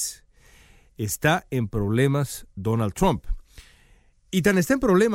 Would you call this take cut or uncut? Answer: uncut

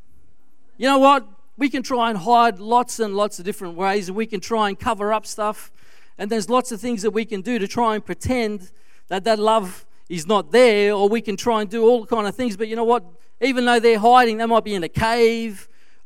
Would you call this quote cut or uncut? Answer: uncut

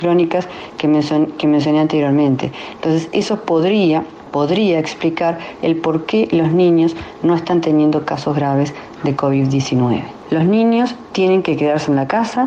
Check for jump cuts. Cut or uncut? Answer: cut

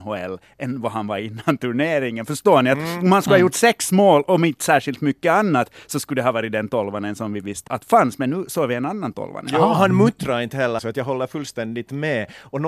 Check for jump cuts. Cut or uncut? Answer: cut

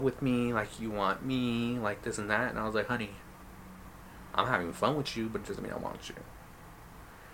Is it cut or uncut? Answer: uncut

